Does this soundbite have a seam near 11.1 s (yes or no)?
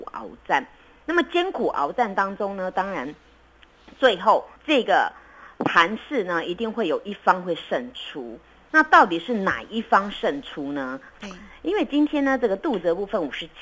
yes